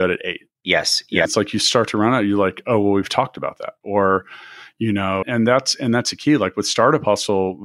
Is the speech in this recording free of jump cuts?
no; 3 cuts; at 1.3 s, 3.8 s, 5.2 s

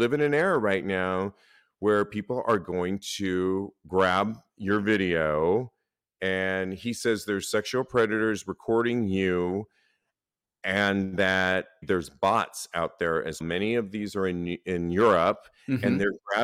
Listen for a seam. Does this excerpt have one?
yes; 2 cuts; at 11.8 s, 13.4 s

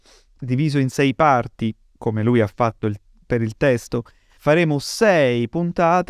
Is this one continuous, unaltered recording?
yes; 0 cuts

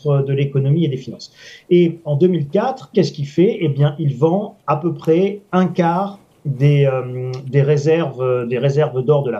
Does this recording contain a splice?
yes; 1 cut; at 2.9 s

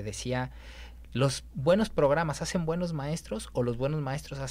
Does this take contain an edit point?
no; 0 cuts

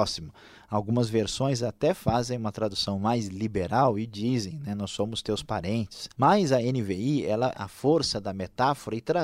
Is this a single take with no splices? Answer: no; 2 cuts; at 6.1 s, 7.5 s

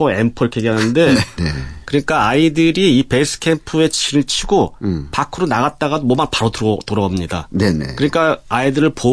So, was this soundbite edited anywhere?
yes; 1 cut; at 1.4 s

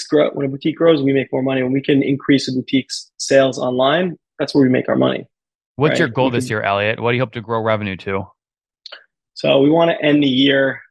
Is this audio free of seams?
yes; 0 cuts

